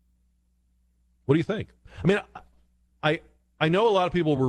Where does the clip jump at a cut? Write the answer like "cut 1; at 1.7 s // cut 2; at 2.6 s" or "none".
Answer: cut 1; at 2.9 s